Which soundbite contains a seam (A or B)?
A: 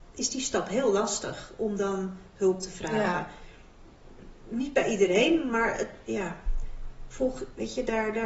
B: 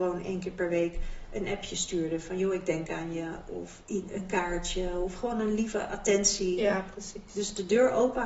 B